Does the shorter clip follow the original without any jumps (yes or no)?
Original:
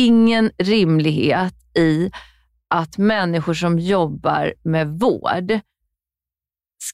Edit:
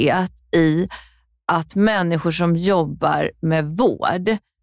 yes